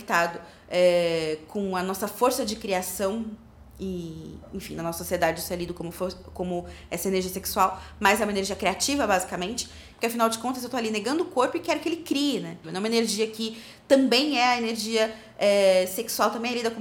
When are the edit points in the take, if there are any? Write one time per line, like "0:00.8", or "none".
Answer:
0:09.9
0:12.6